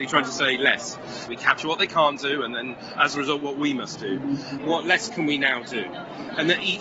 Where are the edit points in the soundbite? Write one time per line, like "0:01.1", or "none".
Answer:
0:01.3
0:04.6